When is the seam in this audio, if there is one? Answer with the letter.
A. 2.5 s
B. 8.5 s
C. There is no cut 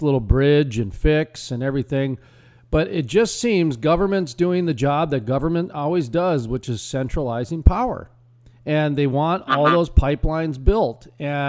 C